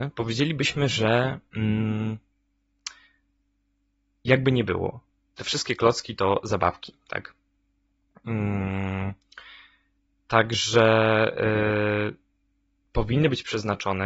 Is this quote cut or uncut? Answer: uncut